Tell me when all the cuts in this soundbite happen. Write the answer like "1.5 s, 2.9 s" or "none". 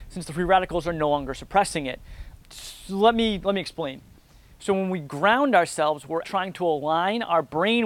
2.4 s, 4.5 s, 6.2 s